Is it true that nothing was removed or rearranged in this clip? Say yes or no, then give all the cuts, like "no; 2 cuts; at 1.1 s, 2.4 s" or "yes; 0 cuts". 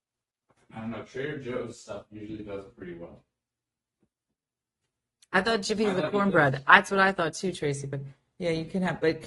yes; 0 cuts